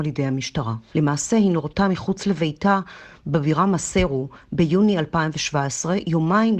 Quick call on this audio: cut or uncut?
cut